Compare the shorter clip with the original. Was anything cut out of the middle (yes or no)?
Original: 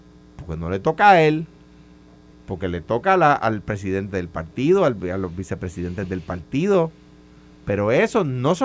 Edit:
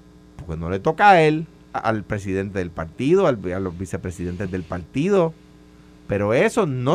yes